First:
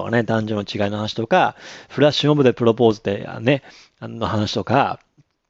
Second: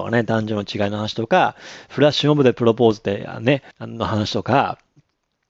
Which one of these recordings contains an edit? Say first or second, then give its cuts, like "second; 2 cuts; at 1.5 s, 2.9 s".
second; 1 cut; at 3.7 s